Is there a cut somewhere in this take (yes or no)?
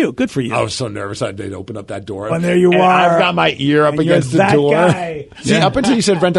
yes